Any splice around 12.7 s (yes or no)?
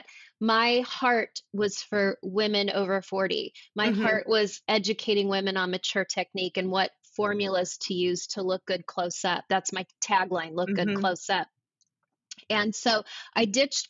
no